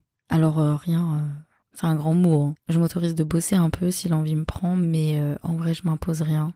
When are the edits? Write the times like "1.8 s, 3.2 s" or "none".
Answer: 1.6 s